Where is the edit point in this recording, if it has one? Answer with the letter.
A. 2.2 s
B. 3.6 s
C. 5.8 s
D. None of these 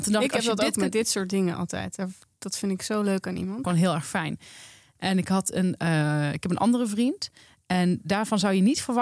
B